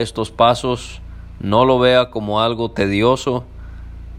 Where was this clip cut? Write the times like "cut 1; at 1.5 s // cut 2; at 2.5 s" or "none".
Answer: none